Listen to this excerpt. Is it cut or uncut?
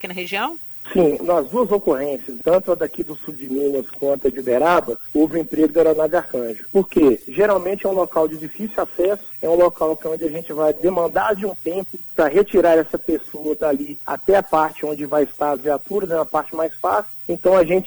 uncut